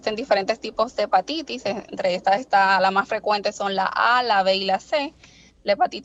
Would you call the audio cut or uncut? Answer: uncut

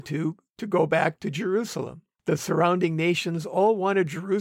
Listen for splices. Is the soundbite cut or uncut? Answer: cut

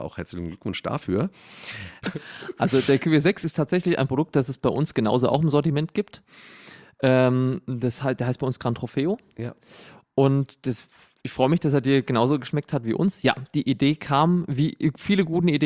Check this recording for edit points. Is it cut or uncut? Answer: cut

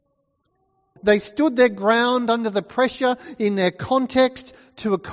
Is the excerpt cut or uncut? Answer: cut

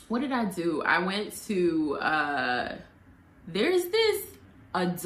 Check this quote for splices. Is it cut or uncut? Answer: uncut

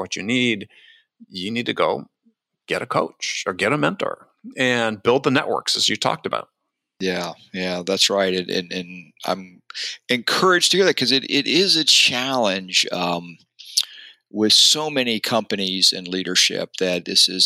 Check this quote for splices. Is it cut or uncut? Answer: uncut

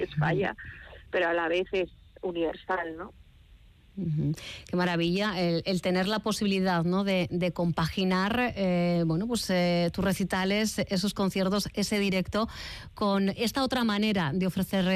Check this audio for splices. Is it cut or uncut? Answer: uncut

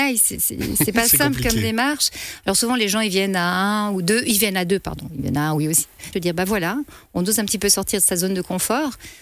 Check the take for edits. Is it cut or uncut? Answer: cut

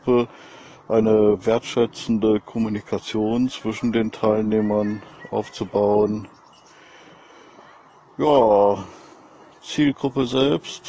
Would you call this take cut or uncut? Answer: uncut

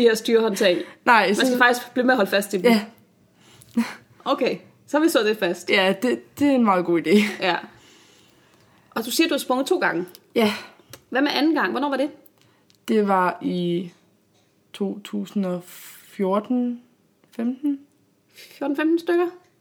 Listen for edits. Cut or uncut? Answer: uncut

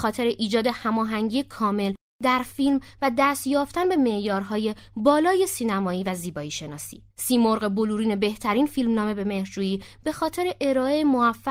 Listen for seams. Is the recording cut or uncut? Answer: cut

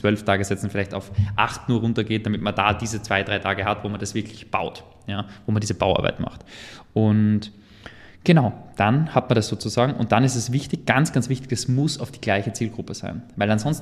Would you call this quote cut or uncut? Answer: uncut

